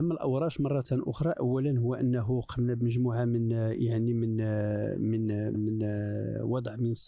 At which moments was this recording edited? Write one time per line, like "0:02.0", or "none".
0:05.5